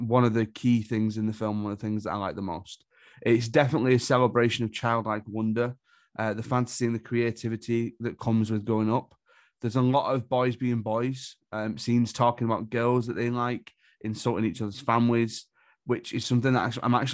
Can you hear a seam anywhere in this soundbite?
no; 0 cuts

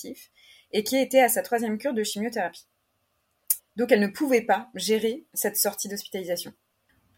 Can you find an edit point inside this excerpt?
yes; 1 cut; at 3.6 s

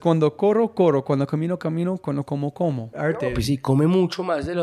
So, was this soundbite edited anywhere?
yes; 1 cut; at 2.9 s

